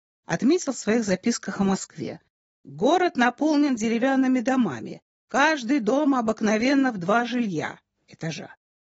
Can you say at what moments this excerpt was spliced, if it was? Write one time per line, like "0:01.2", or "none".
none

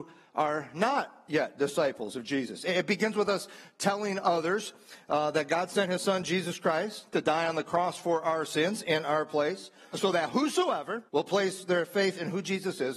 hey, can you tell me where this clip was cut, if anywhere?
0:09.9
0:11.1

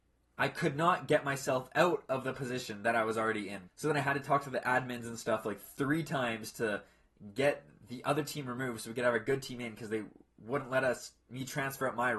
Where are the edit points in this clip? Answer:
0:03.7

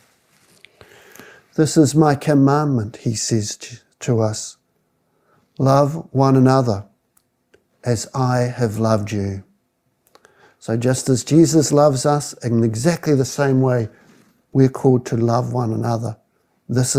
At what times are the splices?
none

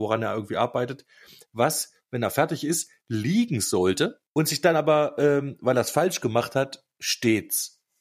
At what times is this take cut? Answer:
0:04.3

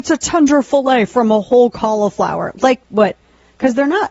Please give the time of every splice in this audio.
0:02.8

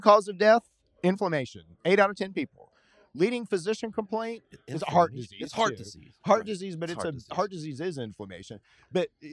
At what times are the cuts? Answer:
none

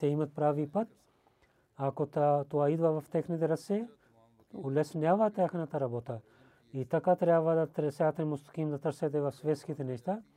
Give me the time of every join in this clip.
none

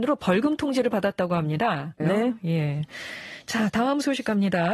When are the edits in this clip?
0:02.0

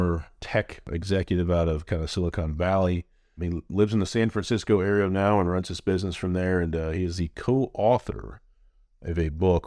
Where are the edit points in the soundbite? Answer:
none

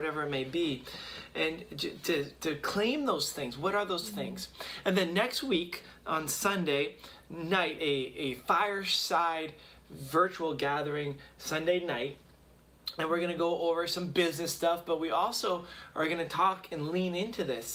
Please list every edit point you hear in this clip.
0:07.8

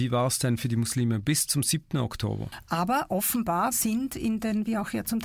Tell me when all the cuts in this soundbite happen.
0:02.6
0:03.7

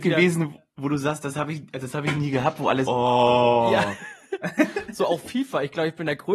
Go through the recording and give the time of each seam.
0:02.8

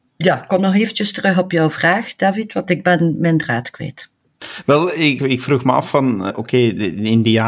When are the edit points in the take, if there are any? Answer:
0:05.2
0:06.3

